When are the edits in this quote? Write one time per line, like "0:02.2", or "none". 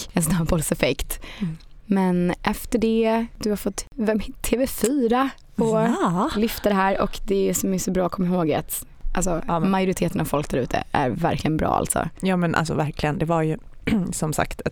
none